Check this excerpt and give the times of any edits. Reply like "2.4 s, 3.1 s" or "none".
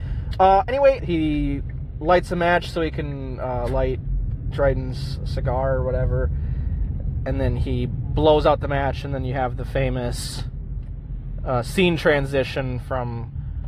1.0 s

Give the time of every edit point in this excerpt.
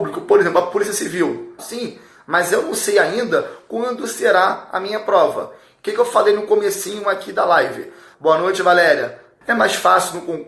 1.6 s, 8.1 s, 9.4 s

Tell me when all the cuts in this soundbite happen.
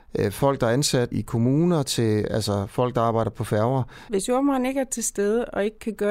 1.1 s, 4.1 s

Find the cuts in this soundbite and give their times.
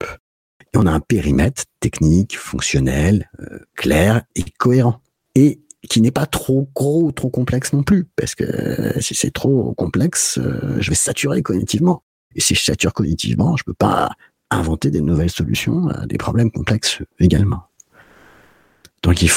none

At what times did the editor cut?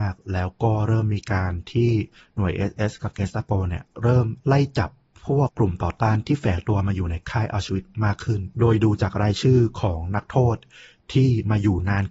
5.5 s, 8.5 s

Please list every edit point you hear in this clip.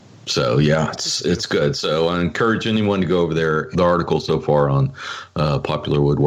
0.9 s, 3.7 s

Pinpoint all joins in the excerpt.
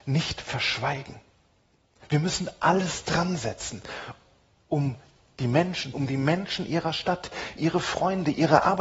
5.9 s, 7.6 s

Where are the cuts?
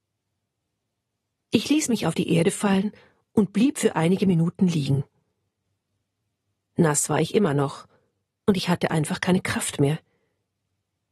none

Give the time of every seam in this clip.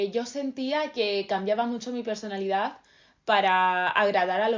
none

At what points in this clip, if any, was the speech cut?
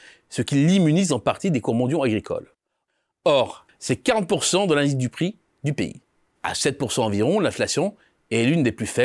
3.7 s, 6.4 s

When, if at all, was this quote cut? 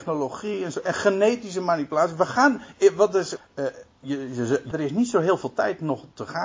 3.4 s, 4.7 s

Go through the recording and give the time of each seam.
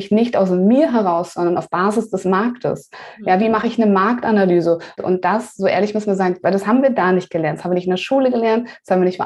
5.0 s, 6.4 s

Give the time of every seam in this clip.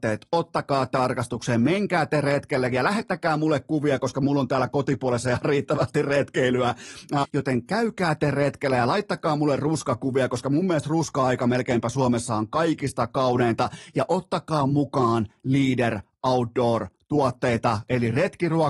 7.2 s

